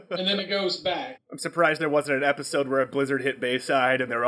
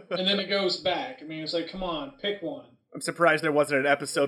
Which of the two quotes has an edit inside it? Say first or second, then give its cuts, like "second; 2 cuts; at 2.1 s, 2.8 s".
first; 1 cut; at 1.2 s